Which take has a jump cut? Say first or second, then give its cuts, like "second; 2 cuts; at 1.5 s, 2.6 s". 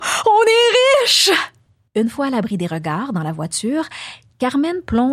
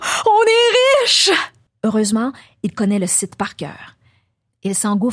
second; 1 cut; at 1.7 s